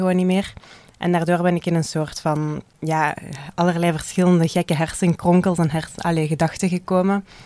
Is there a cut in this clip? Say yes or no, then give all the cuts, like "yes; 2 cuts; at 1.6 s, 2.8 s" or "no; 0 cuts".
yes; 2 cuts; at 0.9 s, 2.7 s